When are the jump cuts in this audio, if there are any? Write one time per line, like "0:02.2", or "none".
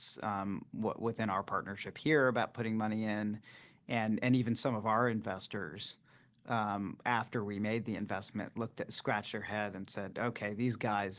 none